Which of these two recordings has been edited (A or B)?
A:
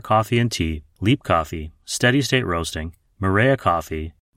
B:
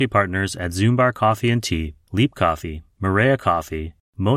B